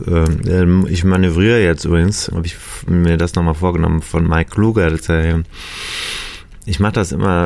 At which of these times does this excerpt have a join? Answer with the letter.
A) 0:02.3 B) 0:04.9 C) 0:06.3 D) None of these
A